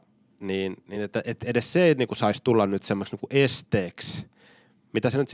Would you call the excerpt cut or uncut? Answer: uncut